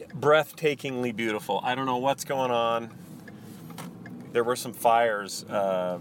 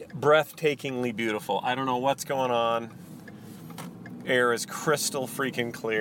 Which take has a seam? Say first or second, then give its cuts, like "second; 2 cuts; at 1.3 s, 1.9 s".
first; 1 cut; at 4.2 s